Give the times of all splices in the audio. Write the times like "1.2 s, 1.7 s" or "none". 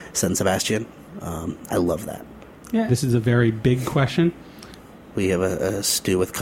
2.9 s, 5.1 s